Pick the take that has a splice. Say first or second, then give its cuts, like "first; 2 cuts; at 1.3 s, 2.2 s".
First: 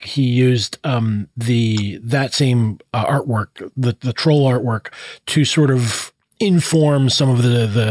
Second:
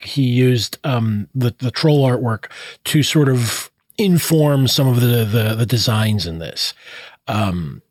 second; 1 cut; at 1.3 s